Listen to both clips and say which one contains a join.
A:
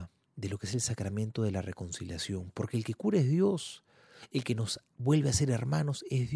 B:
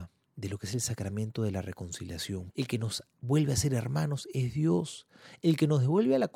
B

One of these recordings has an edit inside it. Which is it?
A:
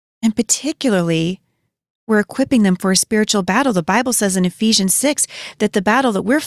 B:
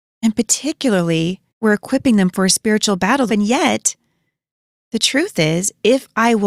B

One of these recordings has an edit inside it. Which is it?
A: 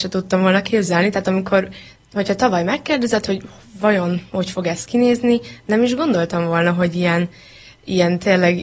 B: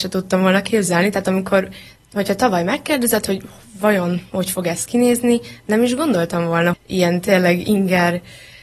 B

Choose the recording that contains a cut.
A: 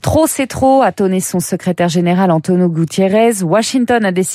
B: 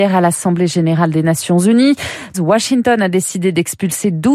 B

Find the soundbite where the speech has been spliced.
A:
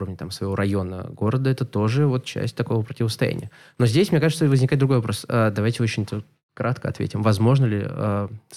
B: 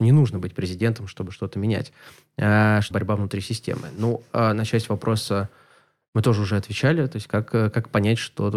B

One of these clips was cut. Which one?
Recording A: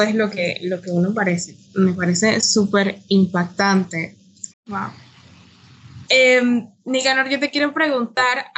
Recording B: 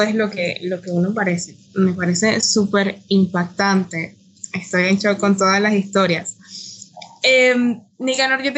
A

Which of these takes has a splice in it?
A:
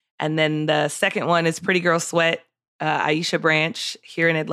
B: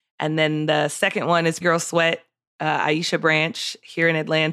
B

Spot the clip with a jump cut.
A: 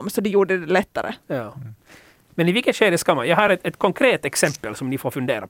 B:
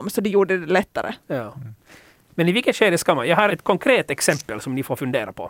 B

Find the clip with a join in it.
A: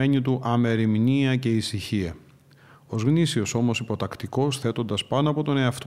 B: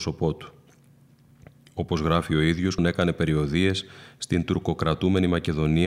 B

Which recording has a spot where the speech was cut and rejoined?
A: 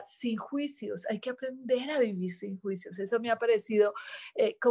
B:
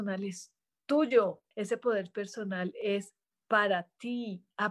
B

